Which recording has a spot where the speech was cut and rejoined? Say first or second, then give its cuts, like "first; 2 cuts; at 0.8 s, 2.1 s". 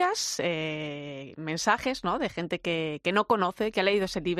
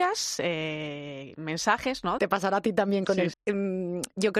second; 2 cuts; at 2.2 s, 3.3 s